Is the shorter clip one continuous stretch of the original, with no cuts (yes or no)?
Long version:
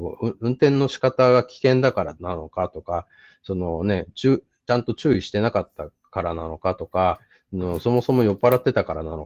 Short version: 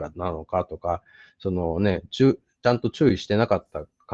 yes